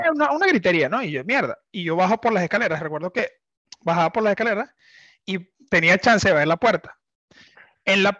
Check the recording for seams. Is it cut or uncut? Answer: uncut